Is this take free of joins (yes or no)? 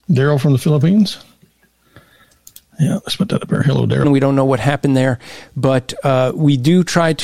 no